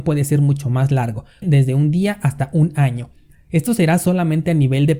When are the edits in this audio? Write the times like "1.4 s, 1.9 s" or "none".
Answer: 1.4 s